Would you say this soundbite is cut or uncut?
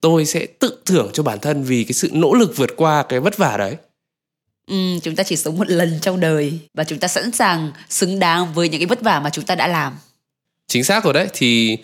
cut